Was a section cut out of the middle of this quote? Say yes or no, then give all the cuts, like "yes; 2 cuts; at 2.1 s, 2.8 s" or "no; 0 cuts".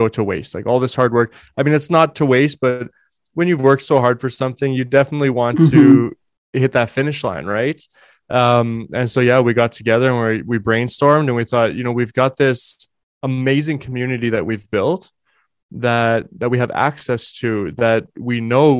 no; 0 cuts